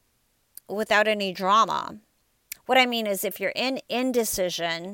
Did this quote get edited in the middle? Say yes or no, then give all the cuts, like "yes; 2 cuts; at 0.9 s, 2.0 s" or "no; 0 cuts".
yes; 1 cut; at 2.6 s